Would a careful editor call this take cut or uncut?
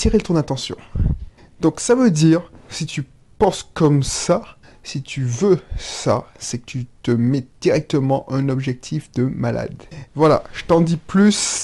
cut